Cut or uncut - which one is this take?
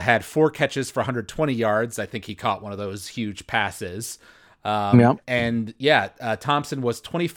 uncut